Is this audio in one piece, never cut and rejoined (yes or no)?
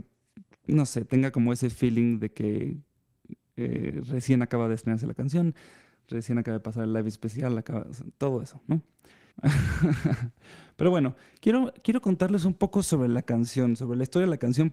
no